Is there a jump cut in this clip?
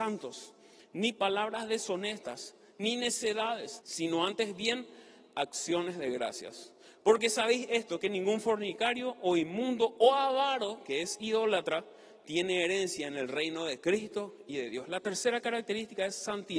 yes; 1 cut; at 3.8 s

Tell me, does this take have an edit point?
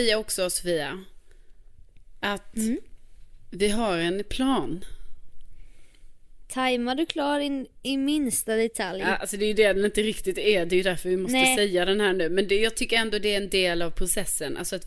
no; 0 cuts

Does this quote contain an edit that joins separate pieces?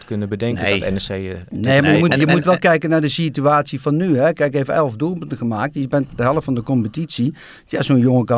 no; 0 cuts

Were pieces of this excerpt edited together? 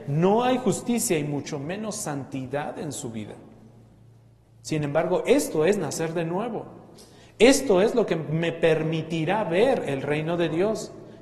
yes; 1 cut; at 4.5 s

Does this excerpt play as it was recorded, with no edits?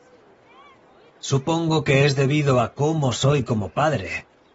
yes; 0 cuts

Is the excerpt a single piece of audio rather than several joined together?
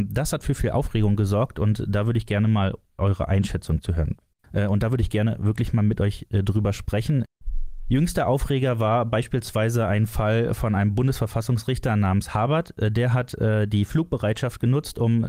no; 1 cut; at 4.4 s

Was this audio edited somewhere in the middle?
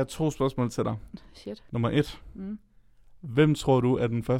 yes; 1 cut; at 1.7 s

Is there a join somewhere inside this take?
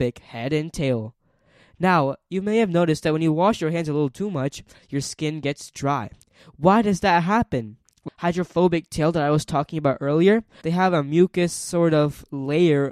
yes; 2 cuts; at 8.1 s, 10.6 s

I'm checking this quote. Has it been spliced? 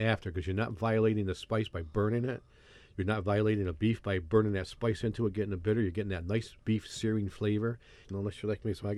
yes; 1 cut; at 8.0 s

